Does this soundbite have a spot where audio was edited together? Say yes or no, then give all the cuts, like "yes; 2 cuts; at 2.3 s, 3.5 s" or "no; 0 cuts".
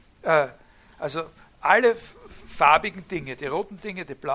no; 0 cuts